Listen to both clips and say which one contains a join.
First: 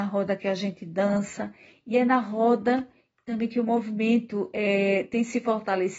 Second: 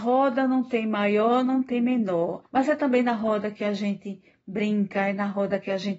second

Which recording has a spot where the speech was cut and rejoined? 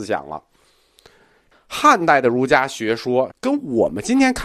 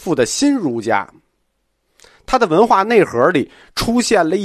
first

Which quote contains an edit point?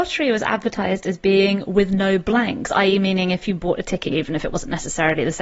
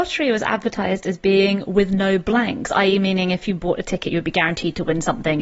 first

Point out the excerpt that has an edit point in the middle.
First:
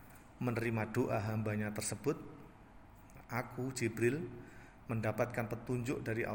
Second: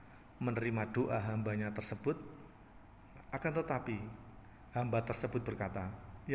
second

